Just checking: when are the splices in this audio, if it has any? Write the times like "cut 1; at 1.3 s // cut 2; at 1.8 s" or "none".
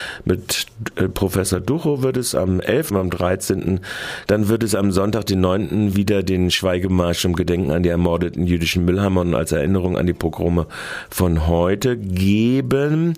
cut 1; at 2.9 s // cut 2; at 4.3 s